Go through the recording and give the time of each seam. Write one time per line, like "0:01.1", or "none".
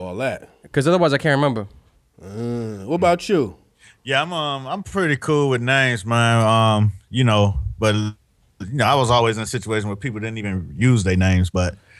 none